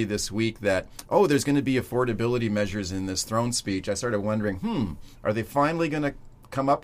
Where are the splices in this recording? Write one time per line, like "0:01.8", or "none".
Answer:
none